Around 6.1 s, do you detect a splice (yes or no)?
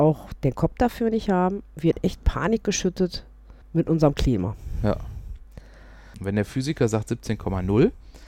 yes